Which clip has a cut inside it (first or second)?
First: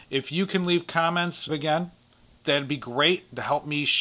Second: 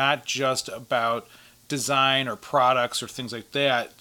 first